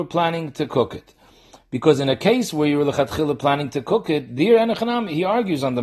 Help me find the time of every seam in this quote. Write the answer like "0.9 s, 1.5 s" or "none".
none

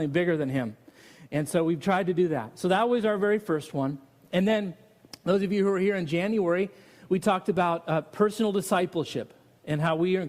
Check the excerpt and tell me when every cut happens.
none

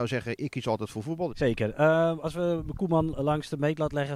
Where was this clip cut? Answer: 1.3 s

